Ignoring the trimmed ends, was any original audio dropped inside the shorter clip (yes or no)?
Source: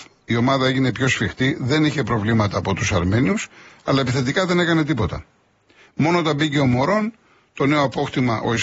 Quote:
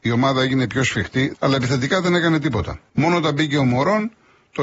yes